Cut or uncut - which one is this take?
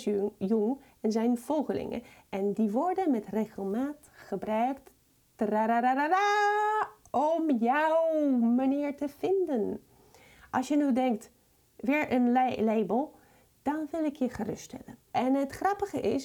cut